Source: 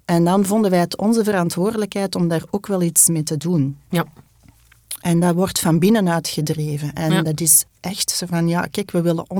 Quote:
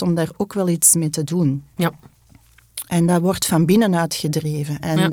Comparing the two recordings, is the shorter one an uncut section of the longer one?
yes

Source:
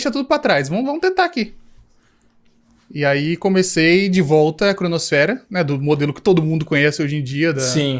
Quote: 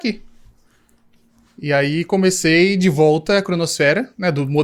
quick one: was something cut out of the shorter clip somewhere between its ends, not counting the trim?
no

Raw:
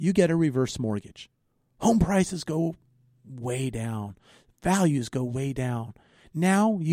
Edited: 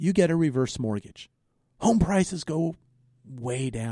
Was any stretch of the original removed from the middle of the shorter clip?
no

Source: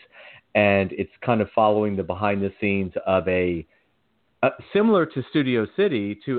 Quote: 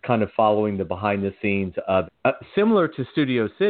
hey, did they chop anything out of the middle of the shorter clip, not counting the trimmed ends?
yes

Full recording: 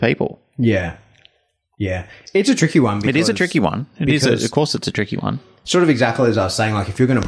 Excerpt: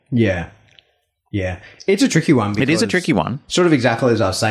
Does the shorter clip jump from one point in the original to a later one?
yes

